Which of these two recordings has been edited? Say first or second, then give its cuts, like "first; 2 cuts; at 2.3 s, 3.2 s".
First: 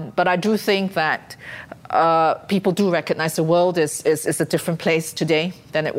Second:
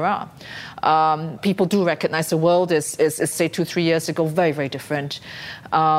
second; 2 cuts; at 1.4 s, 3.3 s